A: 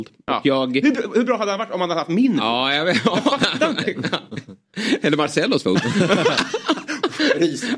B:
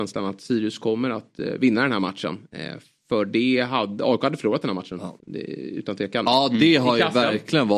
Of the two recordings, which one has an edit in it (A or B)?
B